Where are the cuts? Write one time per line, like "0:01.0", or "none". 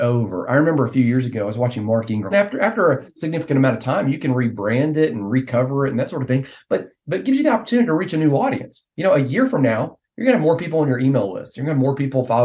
0:02.3